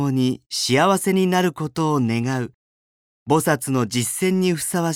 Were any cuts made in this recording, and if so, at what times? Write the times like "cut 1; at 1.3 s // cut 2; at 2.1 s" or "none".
none